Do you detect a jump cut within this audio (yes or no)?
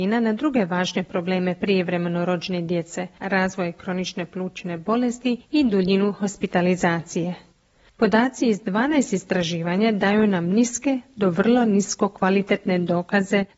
yes